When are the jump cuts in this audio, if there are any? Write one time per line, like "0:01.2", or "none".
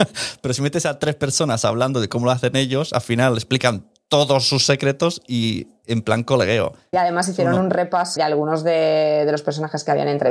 0:06.9
0:08.2